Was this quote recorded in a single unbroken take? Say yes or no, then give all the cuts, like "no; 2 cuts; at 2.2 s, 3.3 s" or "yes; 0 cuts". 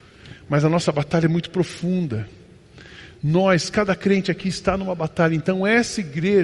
yes; 0 cuts